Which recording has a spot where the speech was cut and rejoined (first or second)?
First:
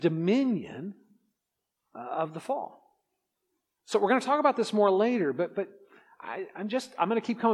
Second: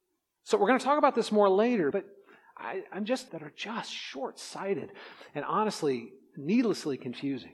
second